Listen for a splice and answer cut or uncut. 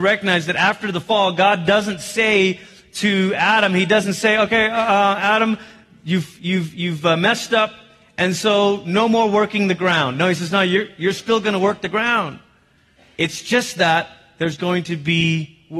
uncut